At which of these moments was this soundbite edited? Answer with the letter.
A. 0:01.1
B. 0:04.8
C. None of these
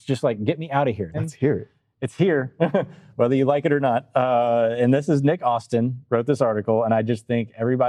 A